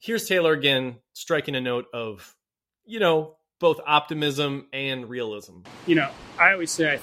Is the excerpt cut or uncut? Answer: uncut